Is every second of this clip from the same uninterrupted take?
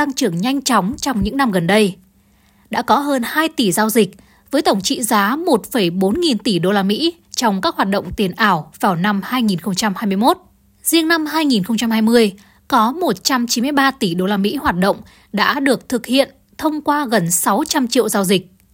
yes; 0 cuts

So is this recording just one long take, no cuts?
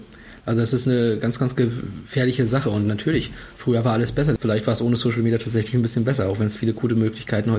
no; 1 cut; at 4.4 s

